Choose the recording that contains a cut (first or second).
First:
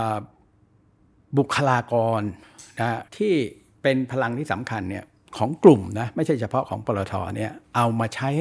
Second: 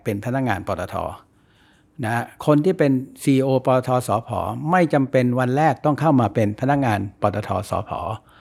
first